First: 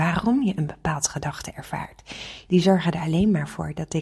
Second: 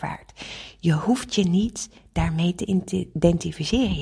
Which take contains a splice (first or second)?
first